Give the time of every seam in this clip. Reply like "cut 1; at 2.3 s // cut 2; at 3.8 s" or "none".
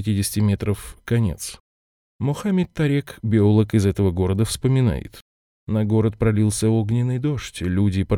none

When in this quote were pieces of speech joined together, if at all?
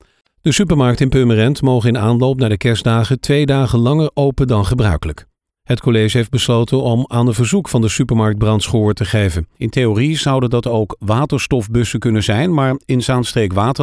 cut 1; at 9.5 s

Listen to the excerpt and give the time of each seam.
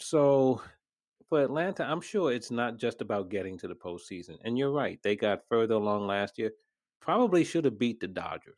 none

